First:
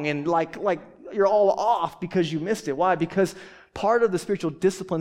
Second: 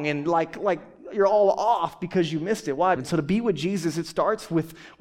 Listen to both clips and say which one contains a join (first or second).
second